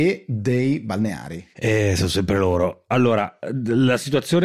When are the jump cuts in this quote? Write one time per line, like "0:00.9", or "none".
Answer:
0:01.5